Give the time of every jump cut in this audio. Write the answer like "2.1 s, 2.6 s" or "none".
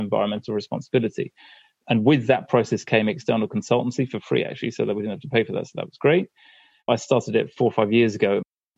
6.8 s